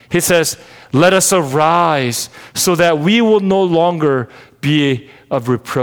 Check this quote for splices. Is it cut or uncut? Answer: uncut